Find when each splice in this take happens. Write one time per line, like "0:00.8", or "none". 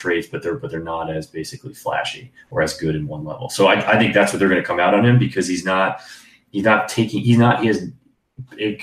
none